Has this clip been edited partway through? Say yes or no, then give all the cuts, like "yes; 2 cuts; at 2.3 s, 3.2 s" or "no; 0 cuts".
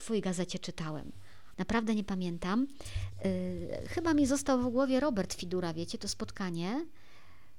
yes; 1 cut; at 1.5 s